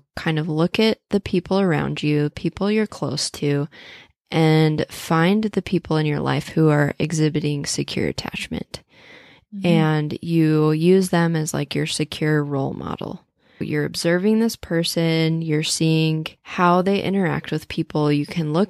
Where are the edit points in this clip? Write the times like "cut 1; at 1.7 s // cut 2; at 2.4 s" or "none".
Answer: cut 1; at 13.6 s // cut 2; at 16.4 s